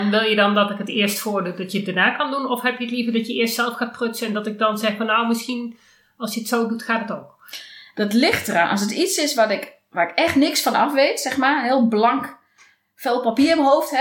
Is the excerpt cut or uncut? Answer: uncut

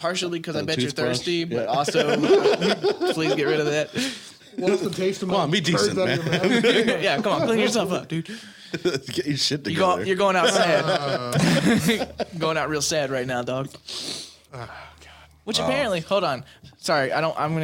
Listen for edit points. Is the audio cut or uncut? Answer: uncut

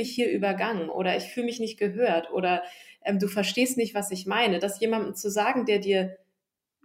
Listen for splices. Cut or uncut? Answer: uncut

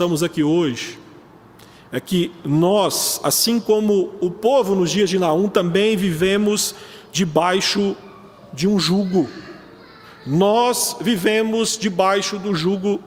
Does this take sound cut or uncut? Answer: uncut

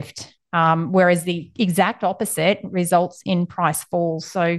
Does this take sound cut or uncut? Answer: uncut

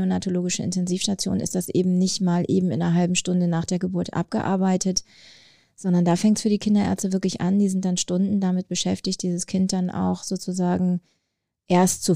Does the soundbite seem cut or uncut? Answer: uncut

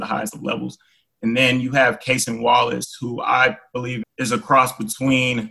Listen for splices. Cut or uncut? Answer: cut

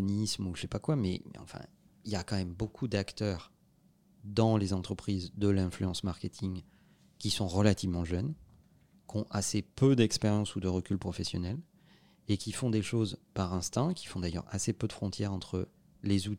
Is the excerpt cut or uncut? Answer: uncut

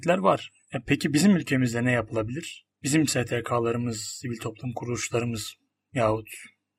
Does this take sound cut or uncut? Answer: cut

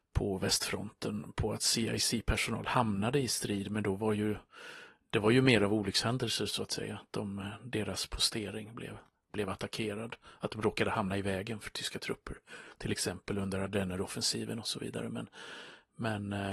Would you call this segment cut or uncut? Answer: uncut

